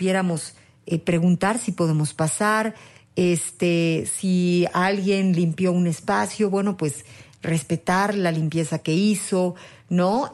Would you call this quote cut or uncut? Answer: uncut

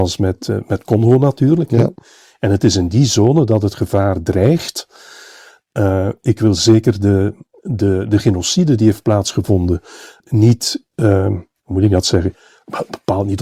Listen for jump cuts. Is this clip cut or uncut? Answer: cut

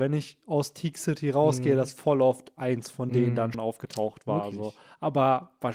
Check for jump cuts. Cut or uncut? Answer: cut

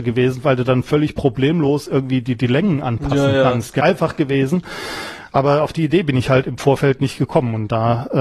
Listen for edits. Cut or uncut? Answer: cut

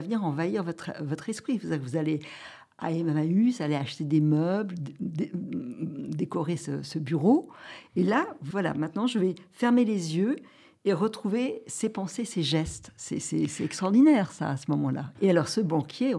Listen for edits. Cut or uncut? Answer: cut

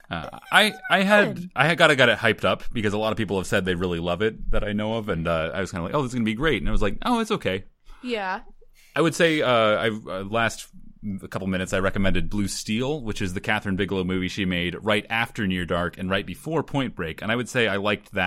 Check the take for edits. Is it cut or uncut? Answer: cut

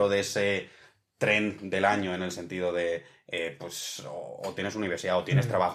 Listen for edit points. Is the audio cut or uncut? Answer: cut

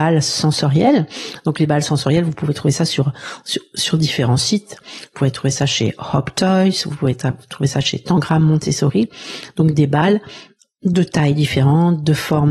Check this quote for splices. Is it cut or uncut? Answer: uncut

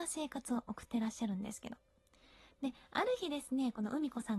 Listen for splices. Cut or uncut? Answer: uncut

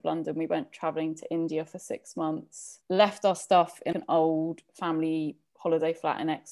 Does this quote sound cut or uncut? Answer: cut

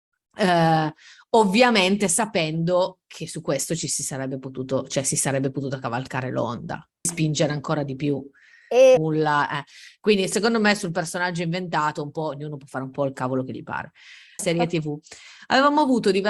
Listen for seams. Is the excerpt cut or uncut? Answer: cut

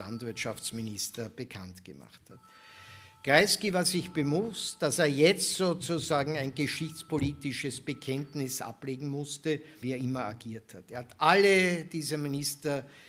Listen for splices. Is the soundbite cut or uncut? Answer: cut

